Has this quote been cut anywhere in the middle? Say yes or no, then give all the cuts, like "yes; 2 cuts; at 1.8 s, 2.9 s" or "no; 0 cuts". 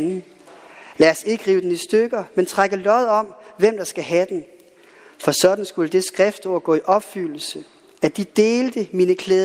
no; 0 cuts